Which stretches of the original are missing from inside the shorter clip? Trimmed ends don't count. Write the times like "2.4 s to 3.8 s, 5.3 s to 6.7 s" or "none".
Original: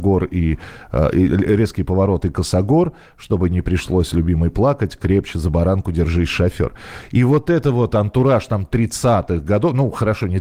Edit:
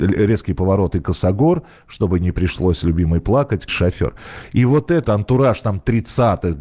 5.0 s to 6.3 s, 7.6 s to 7.9 s